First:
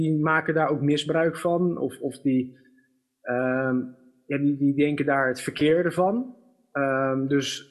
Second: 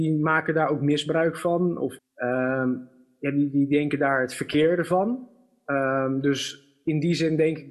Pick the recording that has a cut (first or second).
second